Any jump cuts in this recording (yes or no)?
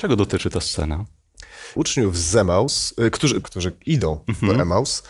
yes